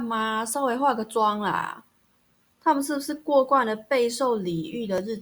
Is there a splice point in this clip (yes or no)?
yes